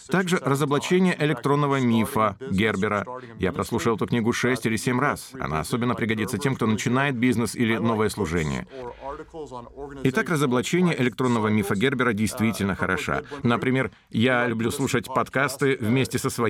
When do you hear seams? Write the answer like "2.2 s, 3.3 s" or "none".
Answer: 13.4 s

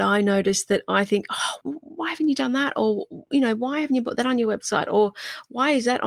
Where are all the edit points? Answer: 1.6 s

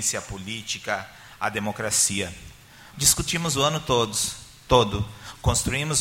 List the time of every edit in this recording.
2.9 s

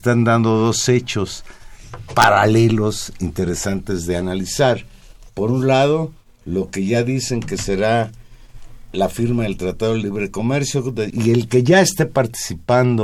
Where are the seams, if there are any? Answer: 11.1 s

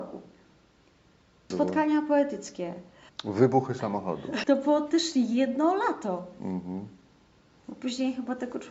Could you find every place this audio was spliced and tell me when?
1.5 s, 3.1 s, 4.4 s

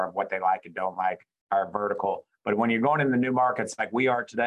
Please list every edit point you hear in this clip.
1.5 s

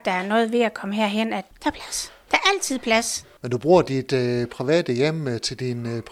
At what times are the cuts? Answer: 1.5 s, 3.4 s

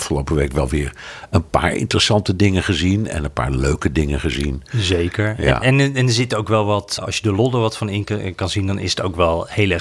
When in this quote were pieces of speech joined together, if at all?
7.0 s

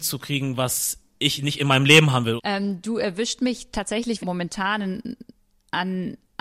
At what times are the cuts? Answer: 2.4 s, 4.2 s

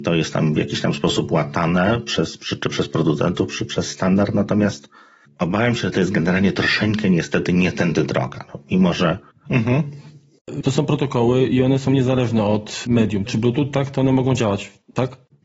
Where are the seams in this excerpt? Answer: 10.6 s, 13.3 s

